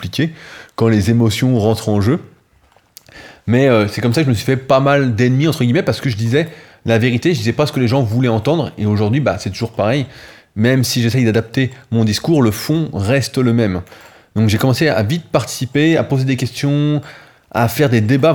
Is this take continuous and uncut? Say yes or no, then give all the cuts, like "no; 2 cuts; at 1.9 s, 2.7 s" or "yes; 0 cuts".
yes; 0 cuts